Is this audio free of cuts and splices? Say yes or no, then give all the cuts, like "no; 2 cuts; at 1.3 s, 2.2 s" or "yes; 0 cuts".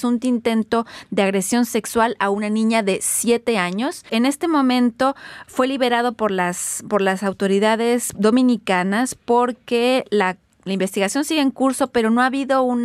no; 1 cut; at 4.1 s